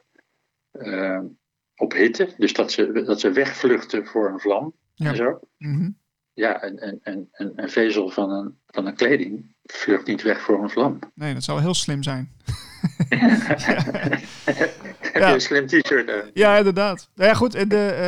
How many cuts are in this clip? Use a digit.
1